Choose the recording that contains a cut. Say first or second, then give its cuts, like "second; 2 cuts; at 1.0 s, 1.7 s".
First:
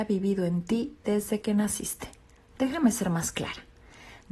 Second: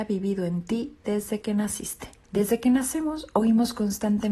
second; 1 cut; at 2.2 s